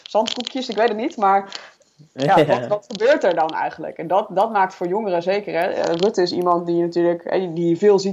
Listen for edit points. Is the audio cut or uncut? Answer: uncut